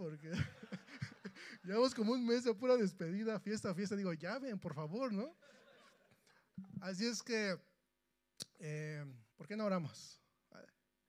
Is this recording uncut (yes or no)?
no